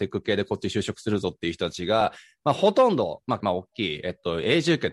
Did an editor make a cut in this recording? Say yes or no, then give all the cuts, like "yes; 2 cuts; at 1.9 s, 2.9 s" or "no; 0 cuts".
yes; 1 cut; at 3.4 s